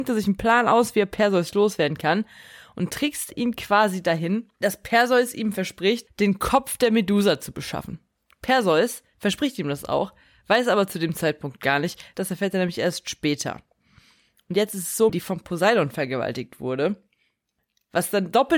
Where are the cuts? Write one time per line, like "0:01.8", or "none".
0:12.1
0:15.1